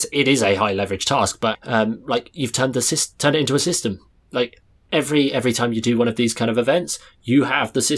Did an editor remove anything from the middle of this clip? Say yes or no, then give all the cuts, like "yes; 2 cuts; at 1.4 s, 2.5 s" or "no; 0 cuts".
yes; 1 cut; at 1.5 s